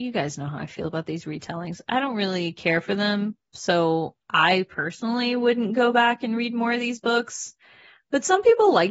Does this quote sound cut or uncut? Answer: uncut